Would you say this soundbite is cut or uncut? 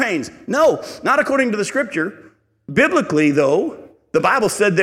uncut